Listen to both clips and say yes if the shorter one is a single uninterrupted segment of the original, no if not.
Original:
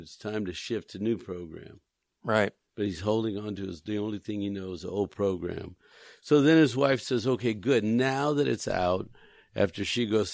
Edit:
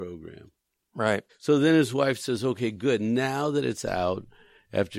no